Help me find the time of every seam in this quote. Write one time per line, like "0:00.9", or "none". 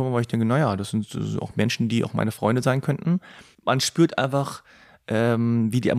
none